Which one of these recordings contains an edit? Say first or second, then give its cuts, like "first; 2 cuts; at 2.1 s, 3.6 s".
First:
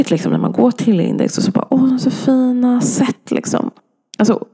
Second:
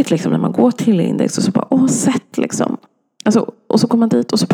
second; 1 cut; at 1.9 s